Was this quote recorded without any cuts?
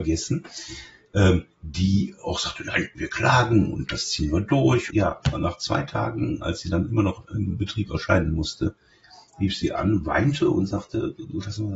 no; 1 cut; at 4.9 s

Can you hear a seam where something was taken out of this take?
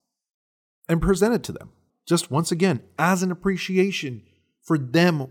yes; 1 cut; at 1.9 s

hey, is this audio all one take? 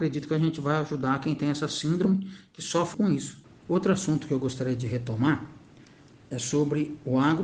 no; 1 cut; at 2.9 s

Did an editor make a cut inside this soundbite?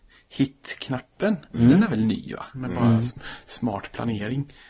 yes; 1 cut; at 2.5 s

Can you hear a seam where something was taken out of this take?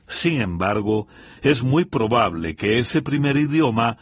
no; 0 cuts

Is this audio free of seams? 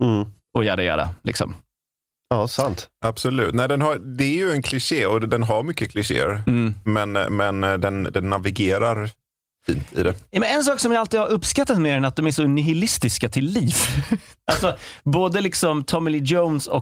yes; 0 cuts

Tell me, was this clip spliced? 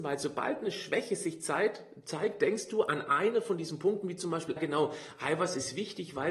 yes; 1 cut; at 4.6 s

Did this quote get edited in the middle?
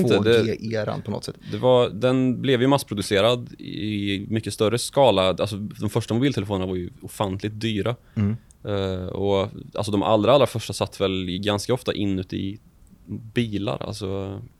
no; 0 cuts

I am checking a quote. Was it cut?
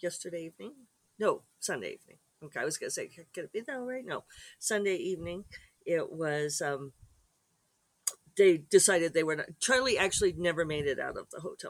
no; 0 cuts

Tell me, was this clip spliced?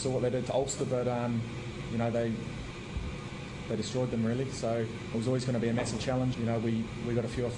yes; 2 cuts; at 5.1 s, 6.3 s

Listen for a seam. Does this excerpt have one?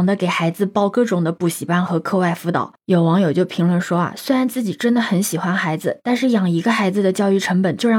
no; 0 cuts

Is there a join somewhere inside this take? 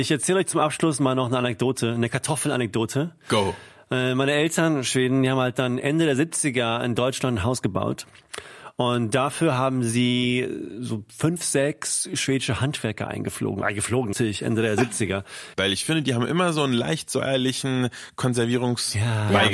yes; 2 cuts; at 14.1 s, 15.5 s

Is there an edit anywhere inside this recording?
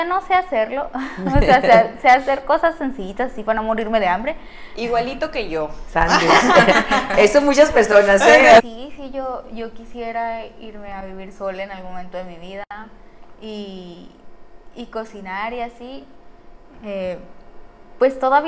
yes; 1 cut; at 8.6 s

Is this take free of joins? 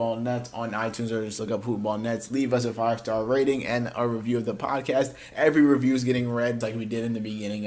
no; 1 cut; at 6.6 s

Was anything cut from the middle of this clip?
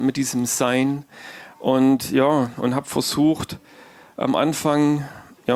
no; 0 cuts

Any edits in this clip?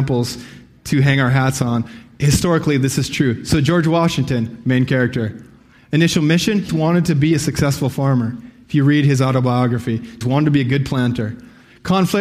yes; 2 cuts; at 6.7 s, 10.2 s

